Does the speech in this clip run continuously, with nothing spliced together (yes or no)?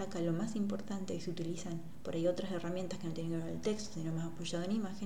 yes